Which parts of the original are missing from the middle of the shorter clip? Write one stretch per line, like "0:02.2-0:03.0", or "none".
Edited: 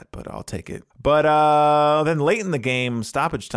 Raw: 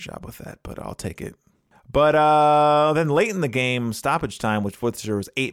0:01.4-0:01.8